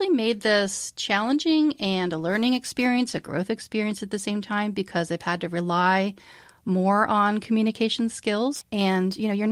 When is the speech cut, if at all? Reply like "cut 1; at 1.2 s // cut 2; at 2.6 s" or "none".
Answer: cut 1; at 8.6 s

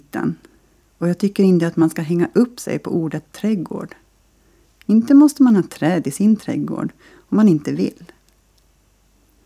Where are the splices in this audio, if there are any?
none

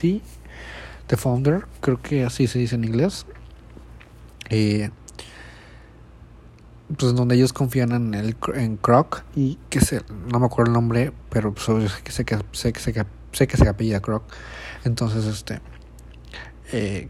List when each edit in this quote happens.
none

